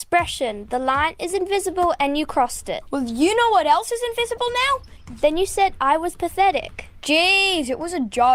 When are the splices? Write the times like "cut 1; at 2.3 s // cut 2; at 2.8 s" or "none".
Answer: cut 1; at 5.2 s